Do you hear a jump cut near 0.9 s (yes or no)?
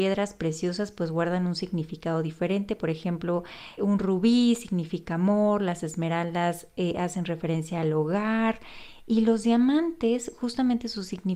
no